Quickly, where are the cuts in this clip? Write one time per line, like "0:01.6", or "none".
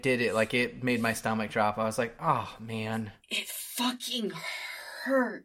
0:03.2